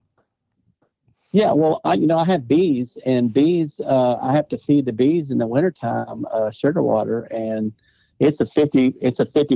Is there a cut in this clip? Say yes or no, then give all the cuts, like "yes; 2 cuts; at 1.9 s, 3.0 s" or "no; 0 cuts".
no; 0 cuts